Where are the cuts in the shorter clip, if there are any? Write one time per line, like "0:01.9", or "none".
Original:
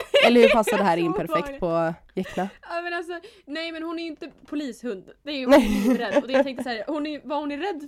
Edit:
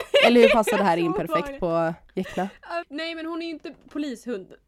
0:02.8